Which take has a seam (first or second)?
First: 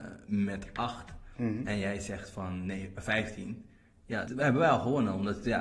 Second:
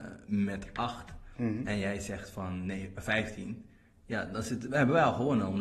first